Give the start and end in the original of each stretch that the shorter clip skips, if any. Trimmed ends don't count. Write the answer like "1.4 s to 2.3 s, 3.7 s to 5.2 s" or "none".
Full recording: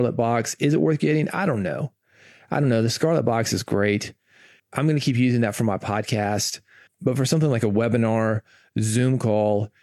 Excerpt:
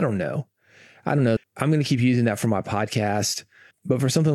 2.8 s to 4.5 s